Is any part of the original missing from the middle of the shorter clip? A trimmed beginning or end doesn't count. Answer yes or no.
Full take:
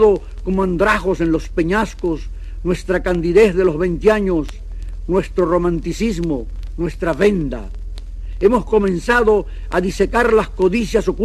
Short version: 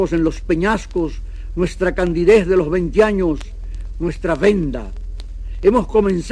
yes